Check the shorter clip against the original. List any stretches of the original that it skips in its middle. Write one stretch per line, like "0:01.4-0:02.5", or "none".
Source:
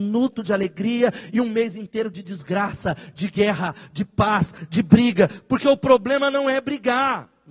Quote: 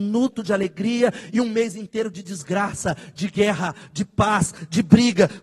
none